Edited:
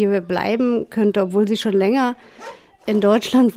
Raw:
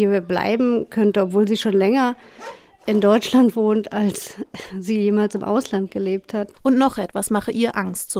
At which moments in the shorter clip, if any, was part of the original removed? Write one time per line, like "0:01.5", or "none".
none

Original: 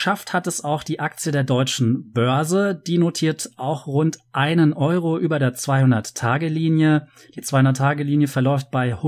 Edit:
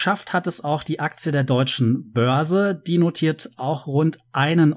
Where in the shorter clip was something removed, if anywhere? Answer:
none

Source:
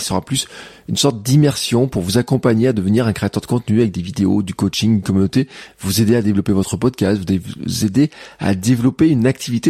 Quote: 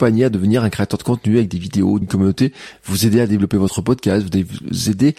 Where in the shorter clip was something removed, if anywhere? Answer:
0:02.0

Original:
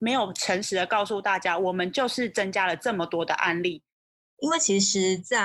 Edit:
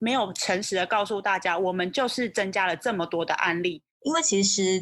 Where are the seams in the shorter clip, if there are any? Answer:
0:03.9

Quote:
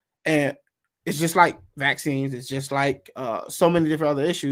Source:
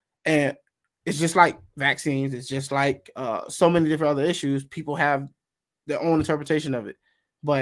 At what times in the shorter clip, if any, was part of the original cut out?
none

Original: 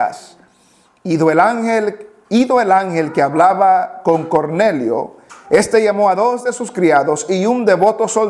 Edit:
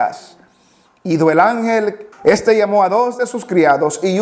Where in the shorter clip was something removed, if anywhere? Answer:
0:02.1

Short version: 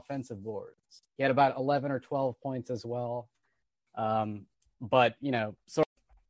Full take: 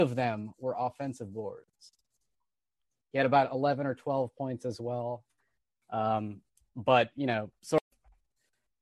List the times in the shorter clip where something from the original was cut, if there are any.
0:01.1

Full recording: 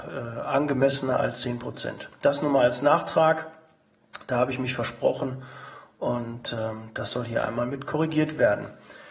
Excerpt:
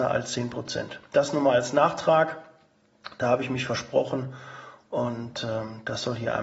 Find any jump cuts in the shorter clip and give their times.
none

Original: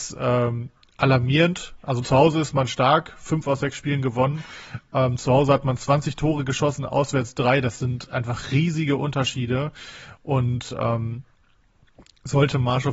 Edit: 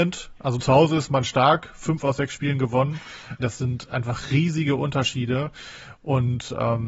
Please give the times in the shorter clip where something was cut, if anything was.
0:03.4

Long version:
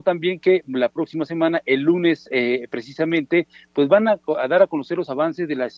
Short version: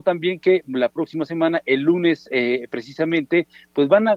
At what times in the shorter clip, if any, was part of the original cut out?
none

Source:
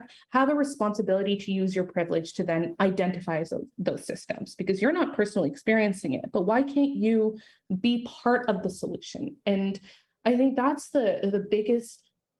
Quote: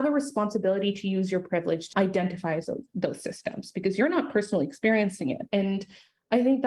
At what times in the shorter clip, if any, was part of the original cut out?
0:01.9
0:05.5

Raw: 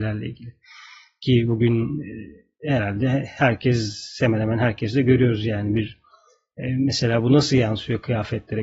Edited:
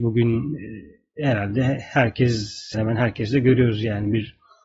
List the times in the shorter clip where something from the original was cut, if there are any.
0:02.7

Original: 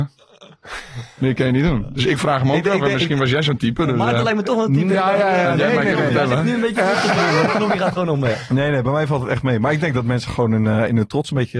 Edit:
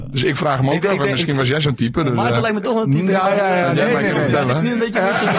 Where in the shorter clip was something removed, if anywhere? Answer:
none

